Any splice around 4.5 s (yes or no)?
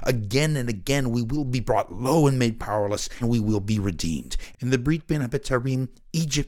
yes